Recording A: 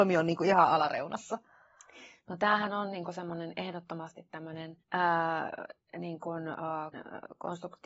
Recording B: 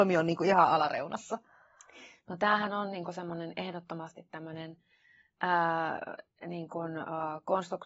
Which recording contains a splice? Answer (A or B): A